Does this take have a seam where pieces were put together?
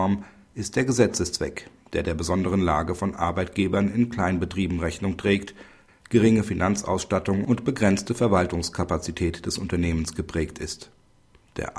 yes; 1 cut; at 5.9 s

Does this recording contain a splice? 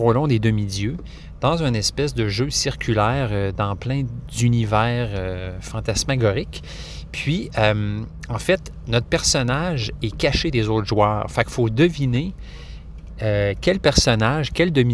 no; 0 cuts

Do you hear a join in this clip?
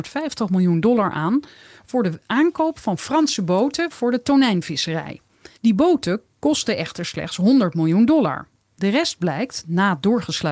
yes; 1 cut; at 5.6 s

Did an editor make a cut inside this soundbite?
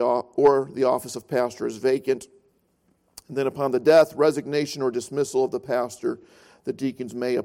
no; 0 cuts

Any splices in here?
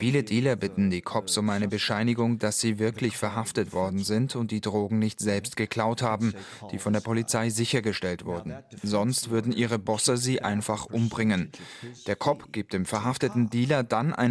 no; 0 cuts

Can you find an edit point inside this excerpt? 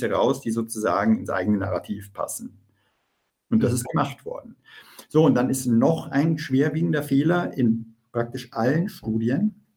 no; 0 cuts

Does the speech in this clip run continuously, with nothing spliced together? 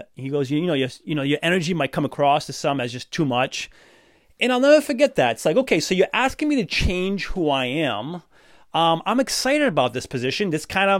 yes; 0 cuts

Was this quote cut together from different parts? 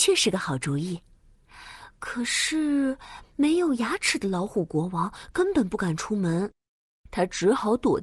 no; 0 cuts

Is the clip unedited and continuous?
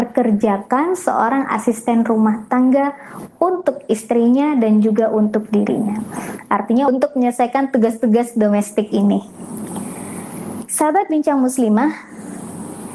yes; 0 cuts

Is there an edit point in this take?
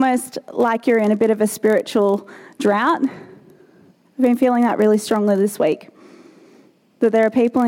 no; 0 cuts

